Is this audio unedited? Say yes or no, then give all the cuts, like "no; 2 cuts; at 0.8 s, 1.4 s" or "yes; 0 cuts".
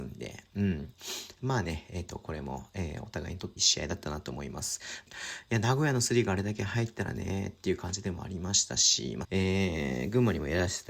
no; 3 cuts; at 3.6 s, 5.1 s, 9.2 s